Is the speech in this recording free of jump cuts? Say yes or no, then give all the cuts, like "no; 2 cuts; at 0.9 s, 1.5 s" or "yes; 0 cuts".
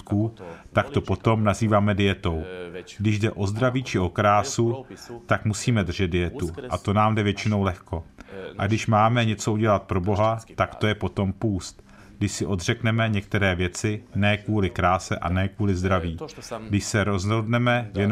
yes; 0 cuts